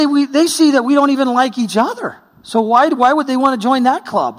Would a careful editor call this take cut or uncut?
uncut